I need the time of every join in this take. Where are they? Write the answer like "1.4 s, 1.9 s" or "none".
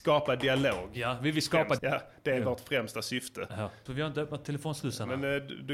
1.8 s, 3.9 s